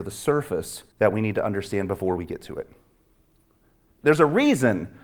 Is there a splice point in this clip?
yes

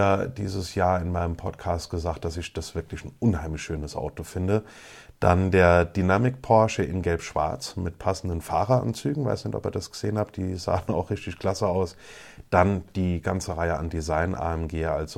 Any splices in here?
no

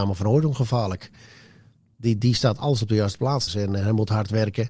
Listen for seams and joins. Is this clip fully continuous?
no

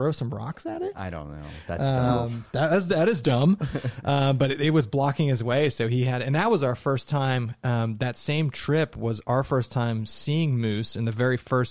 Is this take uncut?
yes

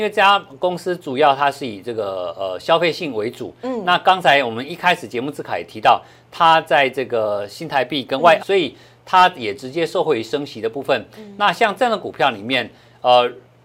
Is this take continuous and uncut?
no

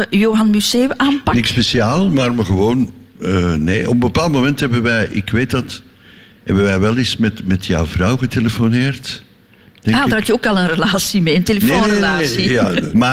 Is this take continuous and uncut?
yes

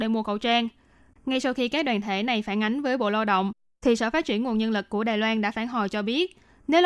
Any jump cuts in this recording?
yes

